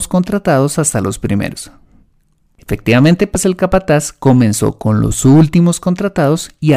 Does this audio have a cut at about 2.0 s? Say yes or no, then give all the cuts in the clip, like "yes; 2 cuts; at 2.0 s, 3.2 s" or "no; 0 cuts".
no; 0 cuts